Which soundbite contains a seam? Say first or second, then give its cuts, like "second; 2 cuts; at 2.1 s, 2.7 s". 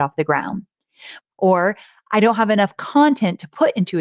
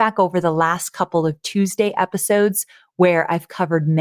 first; 1 cut; at 1.2 s